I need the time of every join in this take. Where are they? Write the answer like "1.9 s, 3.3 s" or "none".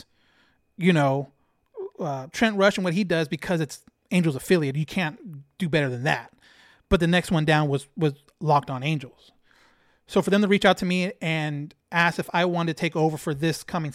11.8 s